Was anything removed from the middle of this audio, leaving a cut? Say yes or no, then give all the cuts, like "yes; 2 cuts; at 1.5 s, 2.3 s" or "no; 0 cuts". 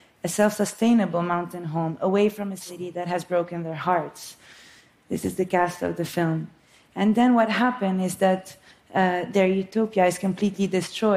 no; 0 cuts